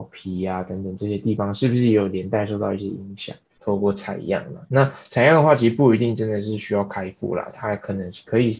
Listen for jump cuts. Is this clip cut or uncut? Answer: cut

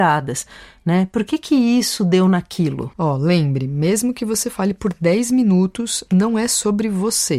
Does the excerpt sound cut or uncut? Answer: uncut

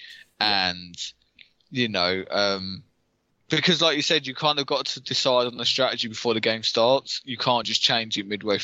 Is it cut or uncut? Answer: uncut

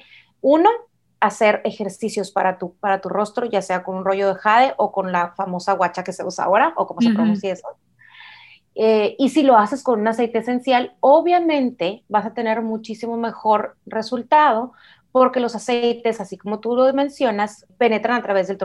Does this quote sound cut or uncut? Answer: uncut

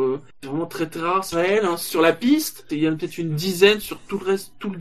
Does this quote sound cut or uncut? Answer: cut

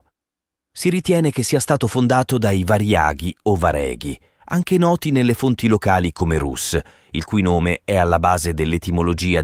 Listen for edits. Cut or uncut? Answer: uncut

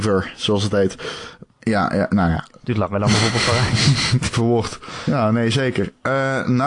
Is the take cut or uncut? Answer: cut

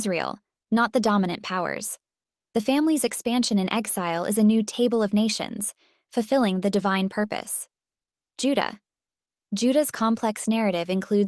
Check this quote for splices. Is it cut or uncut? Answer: uncut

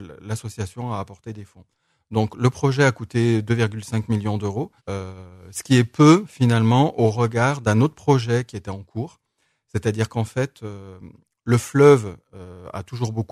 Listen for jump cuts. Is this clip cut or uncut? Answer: cut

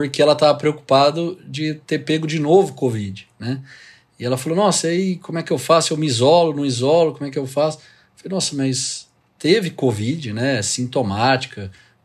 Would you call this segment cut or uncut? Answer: uncut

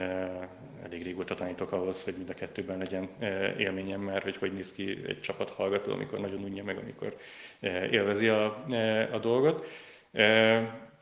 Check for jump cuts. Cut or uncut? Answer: uncut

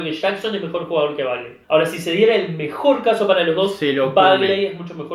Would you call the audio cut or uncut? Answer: cut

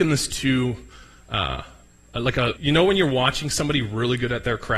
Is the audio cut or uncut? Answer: cut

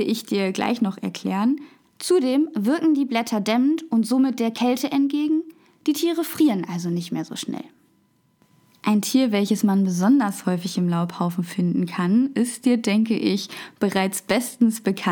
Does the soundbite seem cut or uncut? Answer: cut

